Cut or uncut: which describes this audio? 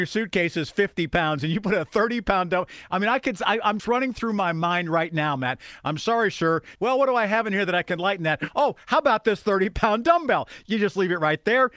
cut